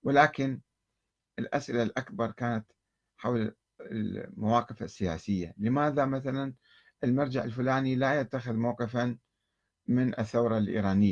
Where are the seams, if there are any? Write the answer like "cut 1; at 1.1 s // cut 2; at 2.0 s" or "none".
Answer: none